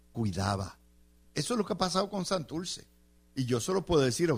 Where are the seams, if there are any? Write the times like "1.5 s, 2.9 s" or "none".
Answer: 1.2 s